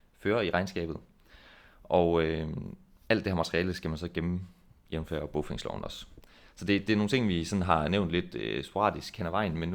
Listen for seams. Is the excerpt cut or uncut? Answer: uncut